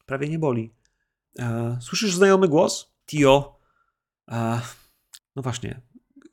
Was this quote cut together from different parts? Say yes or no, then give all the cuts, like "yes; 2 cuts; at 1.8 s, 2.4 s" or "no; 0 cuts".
yes; 3 cuts; at 1.2 s, 3.0 s, 5.2 s